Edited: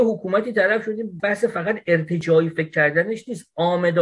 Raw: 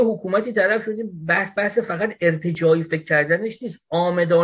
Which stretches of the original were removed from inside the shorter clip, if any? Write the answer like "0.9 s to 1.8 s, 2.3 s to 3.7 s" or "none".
1.2 s to 1.5 s